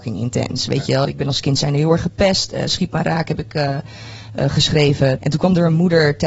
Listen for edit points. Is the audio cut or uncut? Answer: cut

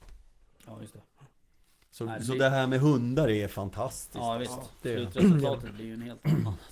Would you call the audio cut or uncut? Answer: uncut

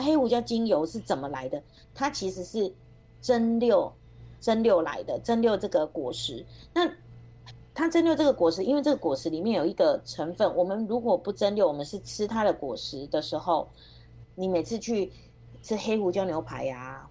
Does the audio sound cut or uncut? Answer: cut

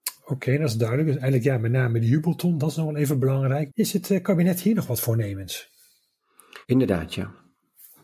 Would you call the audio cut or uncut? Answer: cut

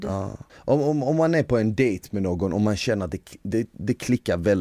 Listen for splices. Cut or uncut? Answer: uncut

